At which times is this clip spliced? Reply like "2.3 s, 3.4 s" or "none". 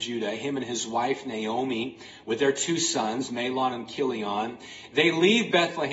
none